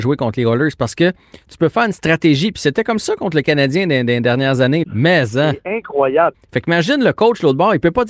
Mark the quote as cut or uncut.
cut